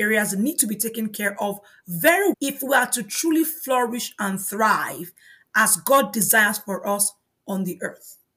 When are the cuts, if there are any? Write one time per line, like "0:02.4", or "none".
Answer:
0:02.3